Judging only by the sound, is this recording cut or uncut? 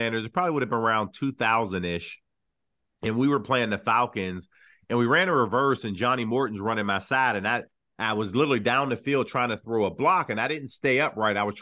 uncut